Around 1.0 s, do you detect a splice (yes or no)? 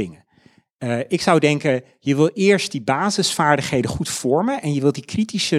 no